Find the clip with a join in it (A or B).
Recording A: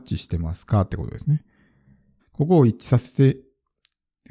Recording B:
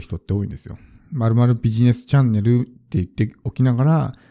A